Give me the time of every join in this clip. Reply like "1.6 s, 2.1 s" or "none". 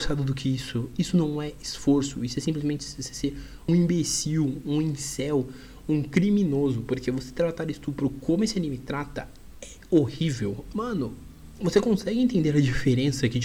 3.7 s, 10.7 s